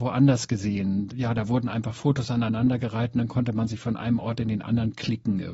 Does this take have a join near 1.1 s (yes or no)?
yes